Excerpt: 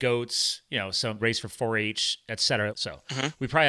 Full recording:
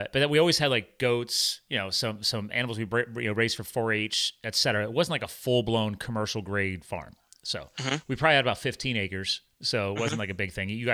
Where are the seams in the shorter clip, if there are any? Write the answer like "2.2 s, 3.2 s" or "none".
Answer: 1.2 s, 2.7 s